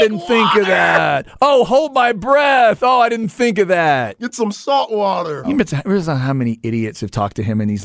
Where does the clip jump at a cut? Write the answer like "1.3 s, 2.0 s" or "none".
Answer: 5.4 s